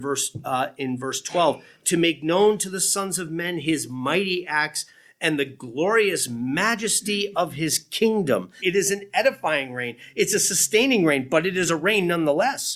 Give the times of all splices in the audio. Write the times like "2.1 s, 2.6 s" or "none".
8.6 s